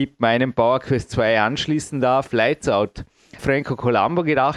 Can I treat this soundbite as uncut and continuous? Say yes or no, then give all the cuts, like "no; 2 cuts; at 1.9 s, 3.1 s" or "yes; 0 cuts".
no; 1 cut; at 3.4 s